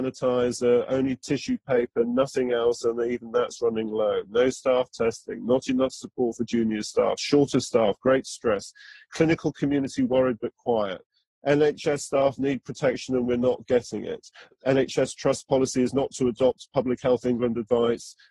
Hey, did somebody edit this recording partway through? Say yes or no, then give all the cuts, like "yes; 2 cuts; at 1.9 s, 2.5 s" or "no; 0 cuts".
no; 0 cuts